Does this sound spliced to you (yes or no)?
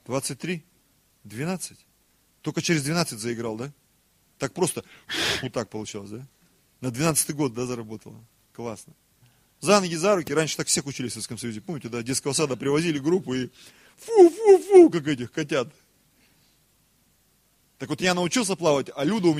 yes